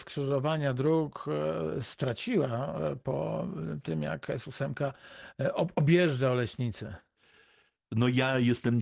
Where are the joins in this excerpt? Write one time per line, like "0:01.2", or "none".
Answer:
none